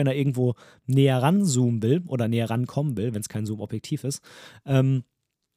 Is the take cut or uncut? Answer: uncut